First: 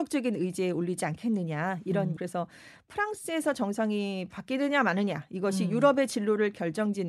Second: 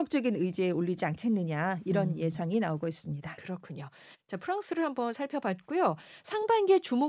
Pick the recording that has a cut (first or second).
first